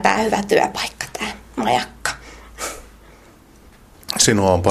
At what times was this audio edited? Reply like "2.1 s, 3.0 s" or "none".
none